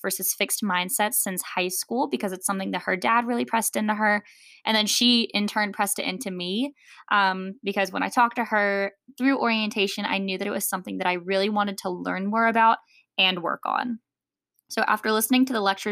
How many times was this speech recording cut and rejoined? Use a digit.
0